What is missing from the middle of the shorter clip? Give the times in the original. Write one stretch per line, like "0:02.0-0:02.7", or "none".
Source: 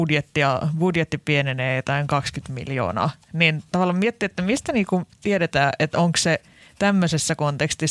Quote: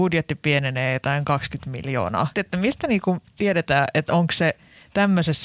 0:03.2-0:04.2

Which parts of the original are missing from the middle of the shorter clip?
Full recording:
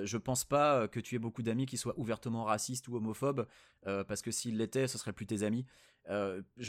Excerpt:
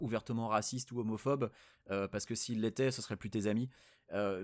none

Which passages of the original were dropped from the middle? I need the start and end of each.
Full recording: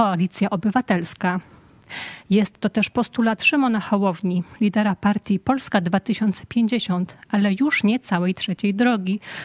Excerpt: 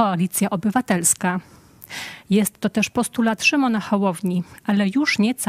0:04.6-0:07.2

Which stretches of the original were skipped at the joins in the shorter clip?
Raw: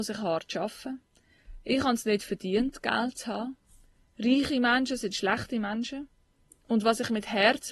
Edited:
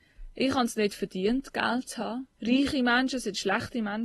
0:03.6-0:04.1

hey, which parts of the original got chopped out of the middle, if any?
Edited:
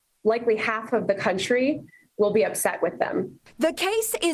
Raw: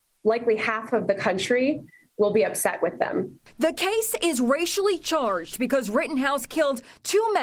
none

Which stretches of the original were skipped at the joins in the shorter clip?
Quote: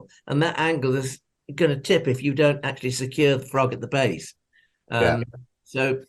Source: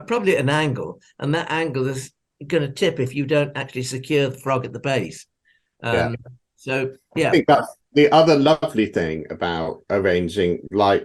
none

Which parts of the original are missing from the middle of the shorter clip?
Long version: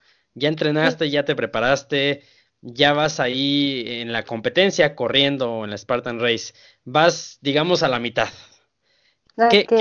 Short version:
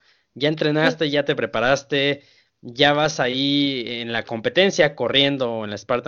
none

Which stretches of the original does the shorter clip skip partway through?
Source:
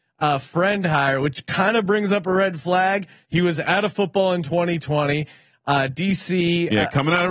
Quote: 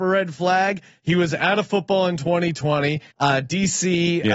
0:05.4-0:05.6

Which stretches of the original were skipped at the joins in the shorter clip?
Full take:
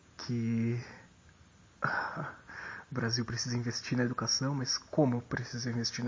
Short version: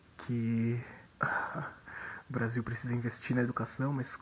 0:01.1-0:01.7

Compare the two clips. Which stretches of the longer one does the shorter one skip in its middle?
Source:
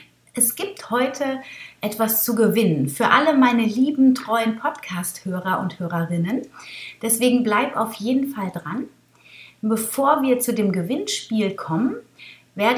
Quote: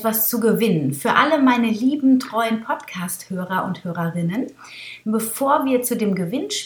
0:07.0-0:09.6

